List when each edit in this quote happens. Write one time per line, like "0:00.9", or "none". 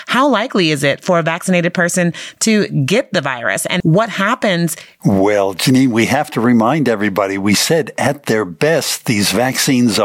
0:03.8
0:05.0